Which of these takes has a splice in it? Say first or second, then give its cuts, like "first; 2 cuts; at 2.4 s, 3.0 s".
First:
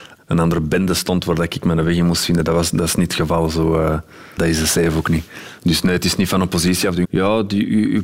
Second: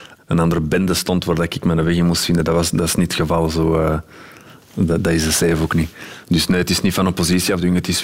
first; 2 cuts; at 4.4 s, 7.0 s